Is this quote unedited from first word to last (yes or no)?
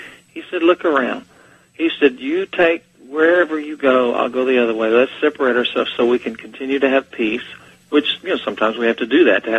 yes